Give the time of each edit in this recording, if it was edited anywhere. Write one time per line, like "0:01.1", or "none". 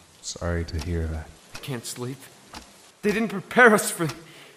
0:01.4
0:02.9